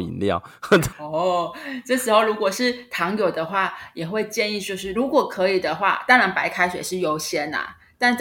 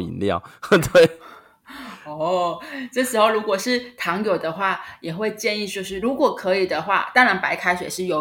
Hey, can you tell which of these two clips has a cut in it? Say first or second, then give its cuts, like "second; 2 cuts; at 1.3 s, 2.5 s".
first; 1 cut; at 0.9 s